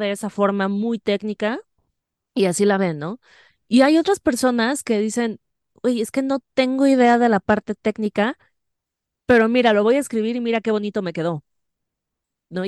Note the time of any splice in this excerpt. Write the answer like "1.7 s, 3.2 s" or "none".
none